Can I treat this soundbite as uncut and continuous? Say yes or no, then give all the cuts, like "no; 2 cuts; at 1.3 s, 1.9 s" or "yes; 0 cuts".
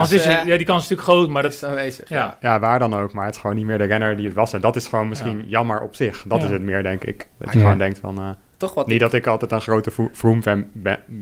yes; 0 cuts